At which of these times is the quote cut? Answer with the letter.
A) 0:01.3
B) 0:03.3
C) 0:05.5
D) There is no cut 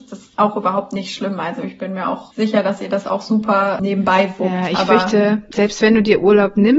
C